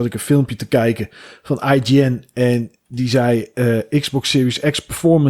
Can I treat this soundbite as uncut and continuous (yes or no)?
yes